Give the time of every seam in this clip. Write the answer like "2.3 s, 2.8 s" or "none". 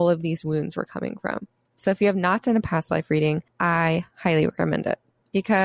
none